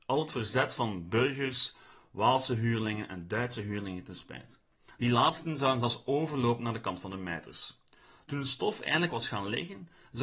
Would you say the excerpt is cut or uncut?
uncut